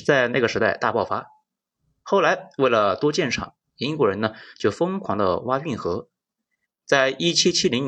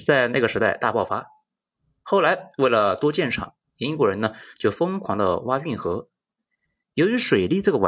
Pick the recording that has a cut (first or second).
first